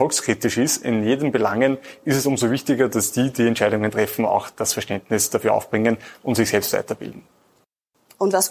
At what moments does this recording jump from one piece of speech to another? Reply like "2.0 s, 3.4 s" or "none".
none